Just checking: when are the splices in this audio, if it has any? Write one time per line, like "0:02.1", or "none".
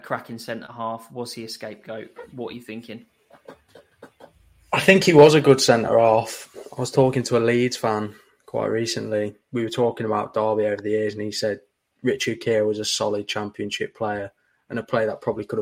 0:09.4